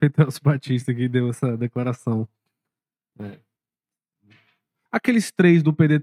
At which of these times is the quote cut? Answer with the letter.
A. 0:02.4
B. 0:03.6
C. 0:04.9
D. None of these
C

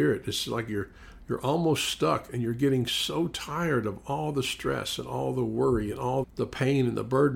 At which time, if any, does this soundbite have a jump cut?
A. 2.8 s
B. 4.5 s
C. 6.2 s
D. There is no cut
C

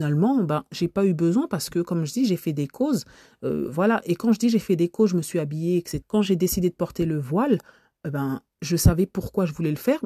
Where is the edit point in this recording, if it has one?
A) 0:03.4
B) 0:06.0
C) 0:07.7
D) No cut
B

